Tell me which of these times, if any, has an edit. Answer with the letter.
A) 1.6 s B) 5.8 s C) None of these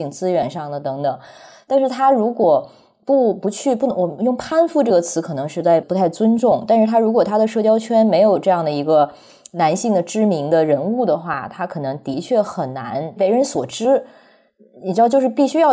B